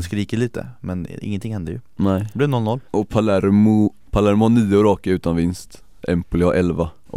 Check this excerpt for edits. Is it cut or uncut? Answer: uncut